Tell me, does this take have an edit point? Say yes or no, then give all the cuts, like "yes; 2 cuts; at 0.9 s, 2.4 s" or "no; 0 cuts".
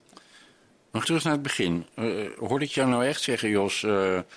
yes; 1 cut; at 1.0 s